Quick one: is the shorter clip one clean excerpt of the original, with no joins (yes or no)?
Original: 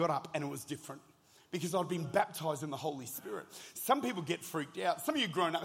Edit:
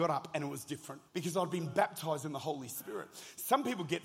no